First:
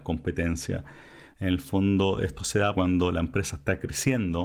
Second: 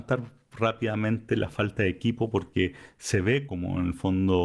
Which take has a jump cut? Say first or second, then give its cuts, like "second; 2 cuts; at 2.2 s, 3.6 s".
first; 2 cuts; at 1.3 s, 2.7 s